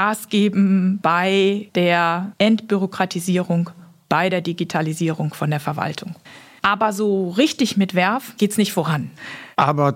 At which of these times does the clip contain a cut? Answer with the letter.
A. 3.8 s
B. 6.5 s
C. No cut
C